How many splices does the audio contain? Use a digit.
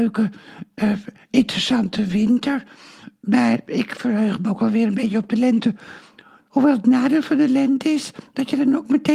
1